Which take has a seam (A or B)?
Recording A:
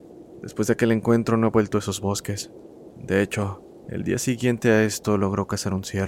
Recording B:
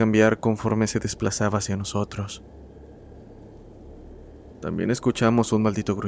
A